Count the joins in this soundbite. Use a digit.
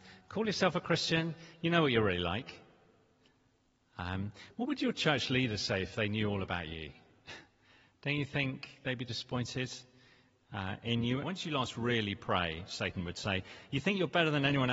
1